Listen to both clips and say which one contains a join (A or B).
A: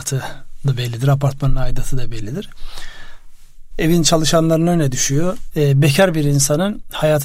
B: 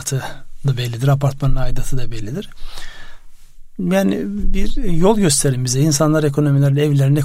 A